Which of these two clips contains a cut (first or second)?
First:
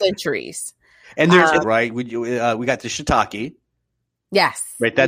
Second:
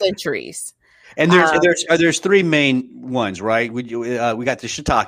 first